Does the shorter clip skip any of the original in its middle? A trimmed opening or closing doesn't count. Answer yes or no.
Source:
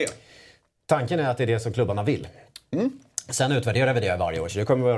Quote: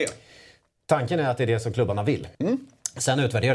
yes